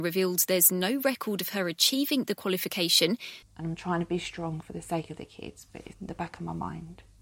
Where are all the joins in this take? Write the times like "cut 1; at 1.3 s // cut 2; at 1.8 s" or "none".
cut 1; at 3.4 s // cut 2; at 5.9 s